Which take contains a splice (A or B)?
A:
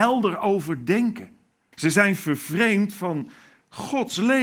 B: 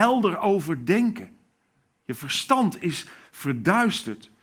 A